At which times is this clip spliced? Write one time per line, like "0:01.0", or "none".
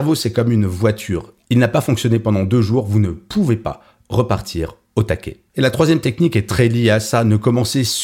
none